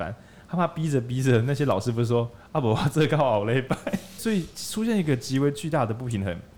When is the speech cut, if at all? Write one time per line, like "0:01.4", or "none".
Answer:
0:04.2

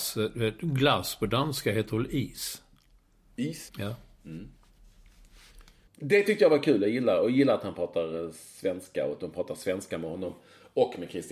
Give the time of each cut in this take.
0:03.7
0:05.9

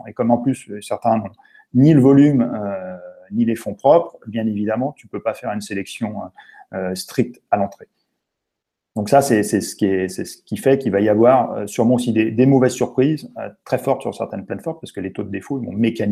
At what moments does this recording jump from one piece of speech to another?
none

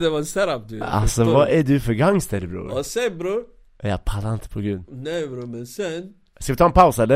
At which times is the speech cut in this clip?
none

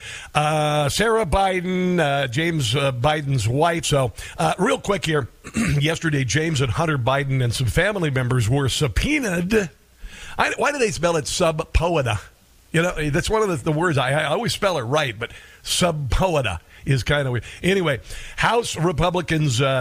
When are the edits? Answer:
0:03.8

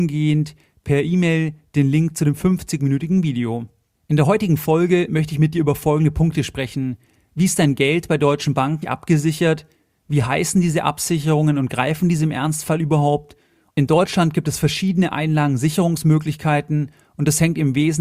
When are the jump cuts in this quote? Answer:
0:08.8
0:13.7

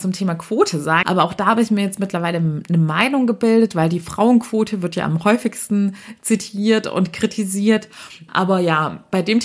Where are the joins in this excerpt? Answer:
0:01.0
0:08.3

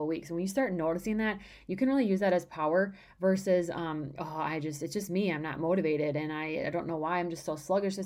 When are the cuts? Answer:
0:04.2

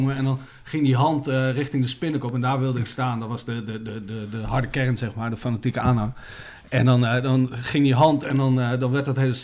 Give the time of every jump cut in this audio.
none

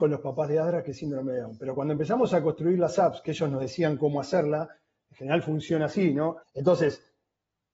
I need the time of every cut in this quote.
0:06.4

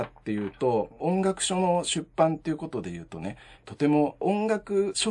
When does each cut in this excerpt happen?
0:03.6

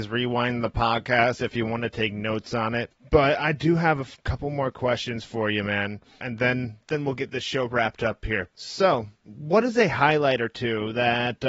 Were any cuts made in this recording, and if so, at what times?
none

